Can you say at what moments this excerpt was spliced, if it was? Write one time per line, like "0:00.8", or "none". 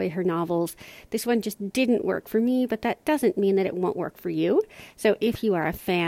none